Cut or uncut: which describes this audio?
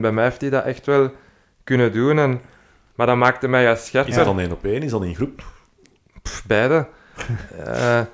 cut